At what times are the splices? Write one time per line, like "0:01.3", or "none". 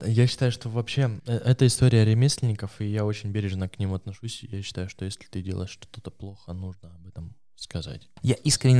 none